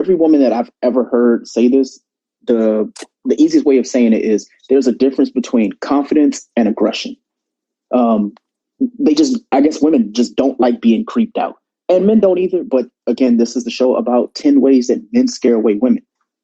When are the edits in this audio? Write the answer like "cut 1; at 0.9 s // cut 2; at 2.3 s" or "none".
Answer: none